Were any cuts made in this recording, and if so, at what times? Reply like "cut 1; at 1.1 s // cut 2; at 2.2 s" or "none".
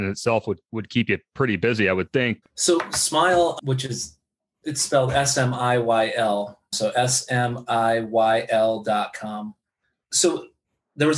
cut 1; at 2.4 s